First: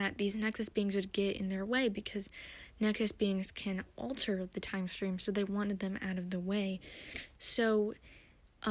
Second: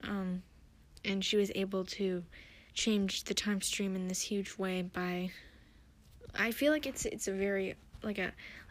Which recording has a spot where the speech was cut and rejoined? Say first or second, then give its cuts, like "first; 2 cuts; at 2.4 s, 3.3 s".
second; 1 cut; at 2.7 s